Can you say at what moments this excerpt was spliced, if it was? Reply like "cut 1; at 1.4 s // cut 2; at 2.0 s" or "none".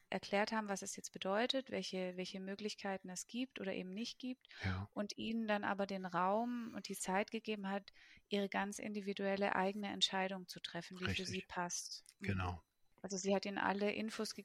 none